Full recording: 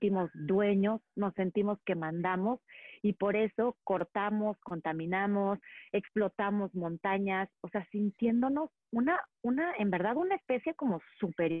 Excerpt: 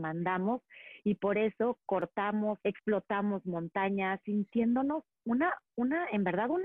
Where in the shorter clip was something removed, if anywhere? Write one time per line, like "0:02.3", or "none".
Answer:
0:02.6
0:04.2